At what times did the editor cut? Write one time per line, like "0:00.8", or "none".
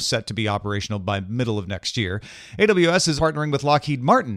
0:03.2